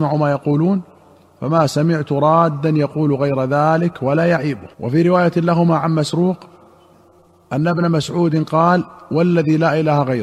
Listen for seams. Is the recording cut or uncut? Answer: cut